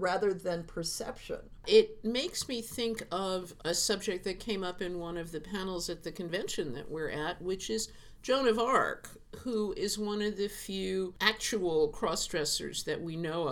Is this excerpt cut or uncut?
uncut